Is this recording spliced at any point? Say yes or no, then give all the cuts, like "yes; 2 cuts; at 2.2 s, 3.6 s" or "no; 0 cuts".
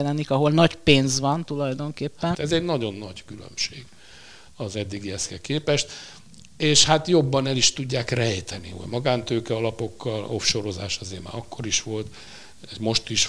yes; 1 cut; at 2.3 s